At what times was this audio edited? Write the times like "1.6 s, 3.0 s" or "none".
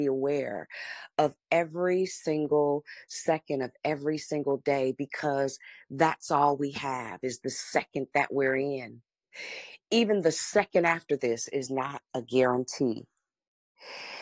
none

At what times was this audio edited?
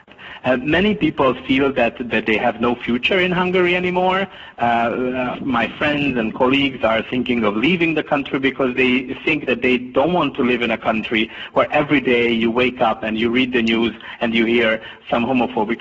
2.1 s, 5.3 s

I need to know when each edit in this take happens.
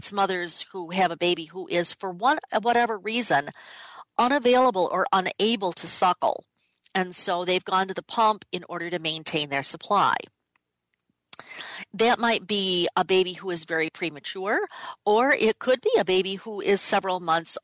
none

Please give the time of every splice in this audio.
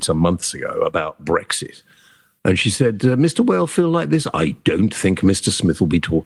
none

